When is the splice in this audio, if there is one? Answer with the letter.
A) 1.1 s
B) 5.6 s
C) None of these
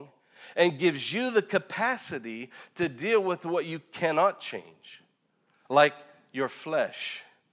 B